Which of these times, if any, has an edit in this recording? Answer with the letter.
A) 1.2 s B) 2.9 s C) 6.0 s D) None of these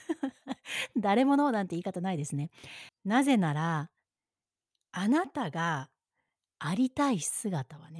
B